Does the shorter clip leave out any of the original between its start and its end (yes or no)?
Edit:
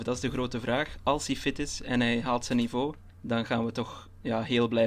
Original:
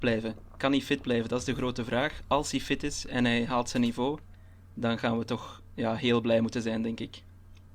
yes